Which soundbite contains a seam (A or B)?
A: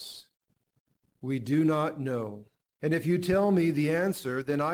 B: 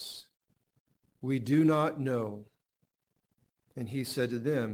A